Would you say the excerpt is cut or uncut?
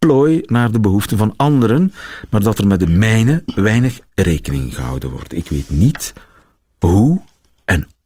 uncut